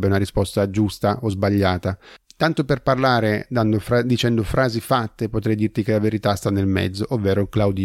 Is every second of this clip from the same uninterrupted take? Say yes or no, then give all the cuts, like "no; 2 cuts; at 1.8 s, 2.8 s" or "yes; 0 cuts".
yes; 0 cuts